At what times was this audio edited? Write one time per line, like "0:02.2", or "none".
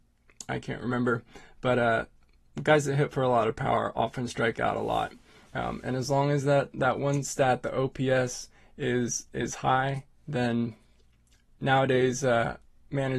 none